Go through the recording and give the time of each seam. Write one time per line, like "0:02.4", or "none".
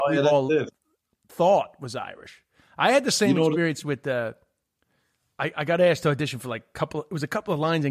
none